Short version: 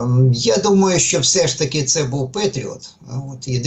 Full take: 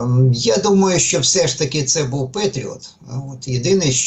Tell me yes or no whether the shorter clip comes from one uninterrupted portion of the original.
yes